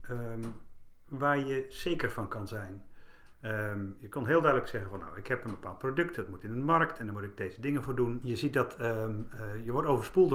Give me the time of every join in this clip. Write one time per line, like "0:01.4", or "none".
0:03.3
0:08.2